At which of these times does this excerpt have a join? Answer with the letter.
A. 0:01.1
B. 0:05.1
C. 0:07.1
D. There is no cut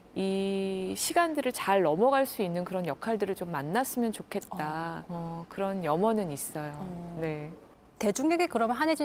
B